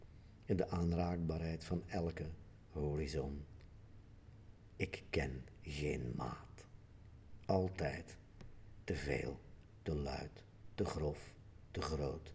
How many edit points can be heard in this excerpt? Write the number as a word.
one